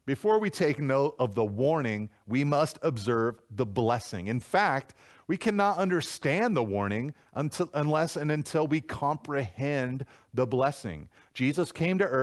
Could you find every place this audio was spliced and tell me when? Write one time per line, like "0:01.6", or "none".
none